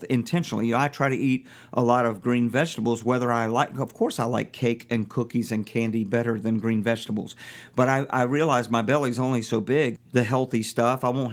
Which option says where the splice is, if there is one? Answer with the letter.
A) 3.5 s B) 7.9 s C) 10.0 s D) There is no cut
C